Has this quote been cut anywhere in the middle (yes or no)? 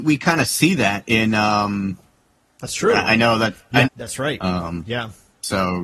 yes